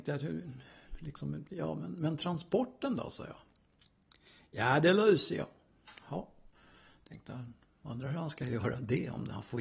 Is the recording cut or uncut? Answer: uncut